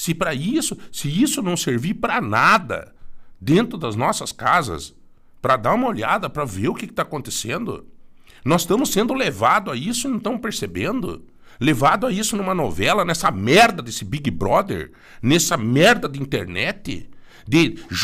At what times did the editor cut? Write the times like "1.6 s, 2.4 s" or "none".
none